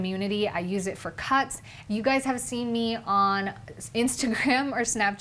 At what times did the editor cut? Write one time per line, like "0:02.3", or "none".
0:01.8